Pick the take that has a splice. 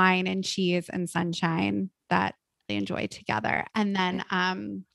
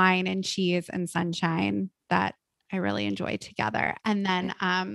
first; 1 cut; at 2.7 s

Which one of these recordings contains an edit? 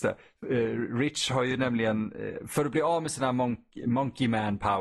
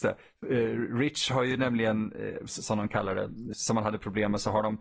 second; 2 cuts; at 2.5 s, 3.5 s

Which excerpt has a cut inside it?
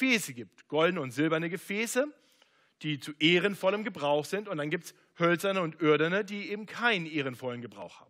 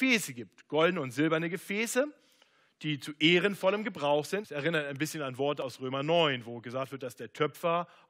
second; 1 cut; at 4.4 s

